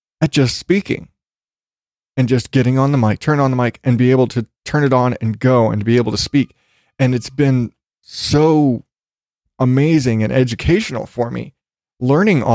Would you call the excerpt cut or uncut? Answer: uncut